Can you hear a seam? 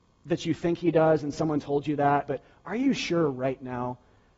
yes; 1 cut; at 2.3 s

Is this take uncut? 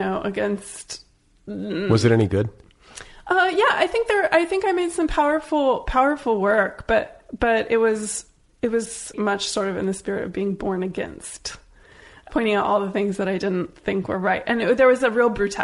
no; 2 cuts; at 9.1 s, 12.3 s

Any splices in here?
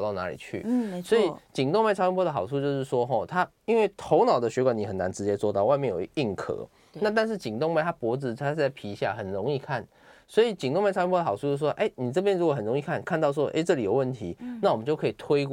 no; 0 cuts

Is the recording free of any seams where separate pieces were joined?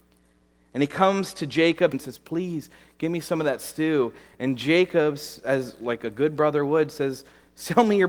no; 1 cut; at 1.9 s

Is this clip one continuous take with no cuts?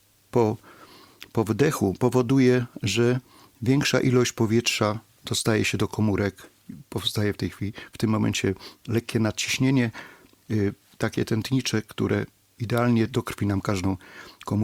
yes; 0 cuts

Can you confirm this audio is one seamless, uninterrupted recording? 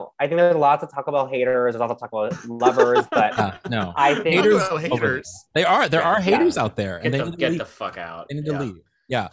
yes; 0 cuts

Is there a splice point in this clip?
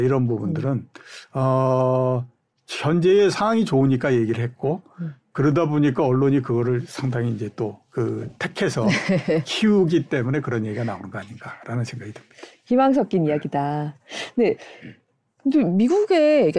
no; 0 cuts

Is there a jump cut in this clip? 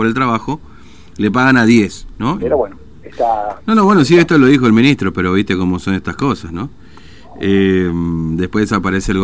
yes; 1 cut; at 2.4 s

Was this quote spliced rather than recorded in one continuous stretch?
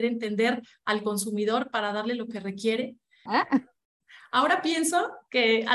yes; 1 cut; at 3.3 s

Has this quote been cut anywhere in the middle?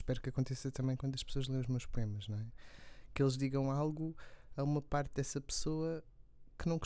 no; 0 cuts

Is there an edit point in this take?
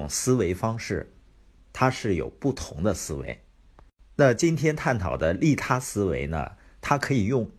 yes; 1 cut; at 1.6 s

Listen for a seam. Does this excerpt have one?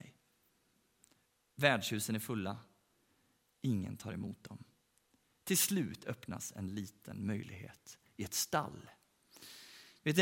no; 0 cuts

